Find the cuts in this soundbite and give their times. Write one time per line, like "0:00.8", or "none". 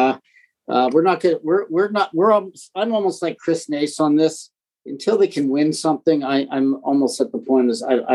none